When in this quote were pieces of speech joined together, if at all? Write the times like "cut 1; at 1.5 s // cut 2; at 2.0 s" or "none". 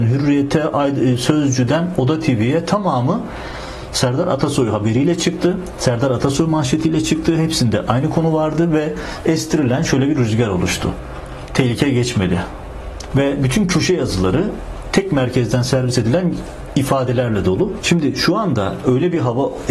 cut 1; at 13.1 s // cut 2; at 17.8 s